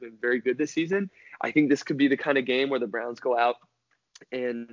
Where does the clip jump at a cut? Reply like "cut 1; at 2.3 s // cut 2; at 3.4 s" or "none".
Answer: none